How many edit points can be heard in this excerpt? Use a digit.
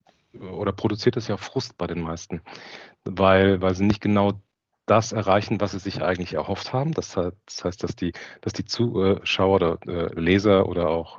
0